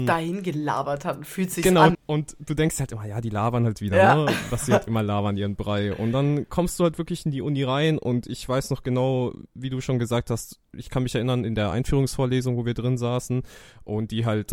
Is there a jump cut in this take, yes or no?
yes